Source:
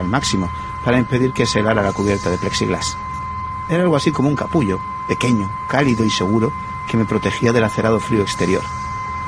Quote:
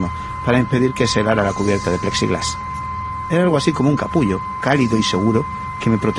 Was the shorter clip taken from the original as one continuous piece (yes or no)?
no